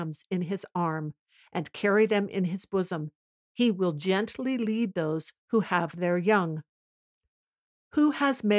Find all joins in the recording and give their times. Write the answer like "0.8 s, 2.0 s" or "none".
none